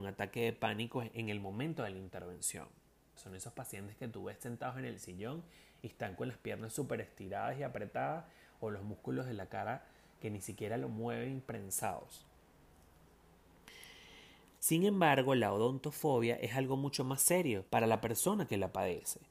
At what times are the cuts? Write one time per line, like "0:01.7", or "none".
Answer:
0:03.2
0:14.6
0:17.7